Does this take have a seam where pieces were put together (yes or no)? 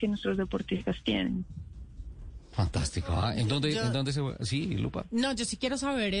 no